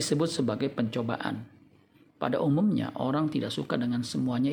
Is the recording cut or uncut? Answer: uncut